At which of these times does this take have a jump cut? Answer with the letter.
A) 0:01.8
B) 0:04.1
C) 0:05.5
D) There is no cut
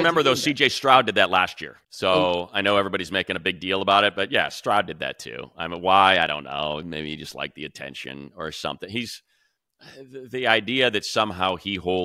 A